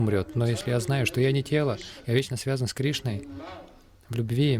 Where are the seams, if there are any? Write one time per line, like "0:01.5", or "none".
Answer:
none